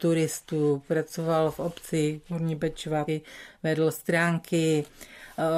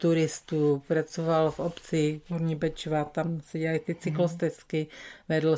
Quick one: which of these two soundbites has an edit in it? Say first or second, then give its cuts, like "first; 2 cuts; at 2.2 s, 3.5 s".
first; 1 cut; at 3.1 s